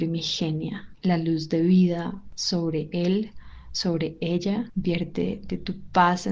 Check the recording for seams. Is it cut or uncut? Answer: uncut